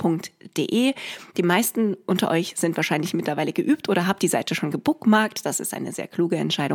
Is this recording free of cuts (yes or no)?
yes